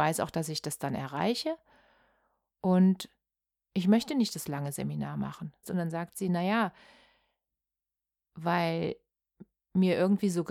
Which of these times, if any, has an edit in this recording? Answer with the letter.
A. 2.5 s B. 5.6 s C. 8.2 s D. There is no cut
B